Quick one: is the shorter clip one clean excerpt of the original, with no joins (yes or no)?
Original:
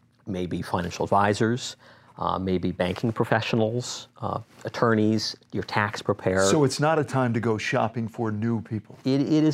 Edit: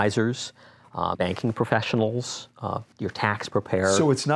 no